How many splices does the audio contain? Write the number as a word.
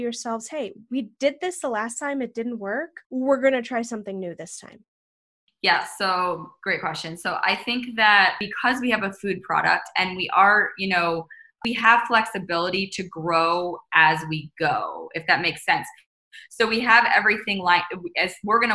one